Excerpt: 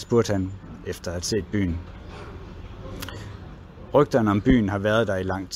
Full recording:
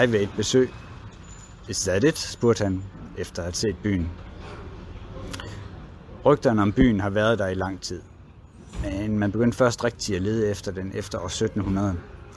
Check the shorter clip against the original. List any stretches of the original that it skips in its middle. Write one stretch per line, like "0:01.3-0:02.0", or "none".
none